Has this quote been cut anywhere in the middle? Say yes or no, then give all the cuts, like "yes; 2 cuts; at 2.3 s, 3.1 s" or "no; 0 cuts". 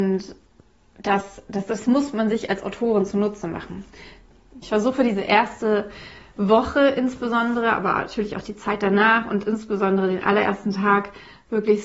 yes; 1 cut; at 4.6 s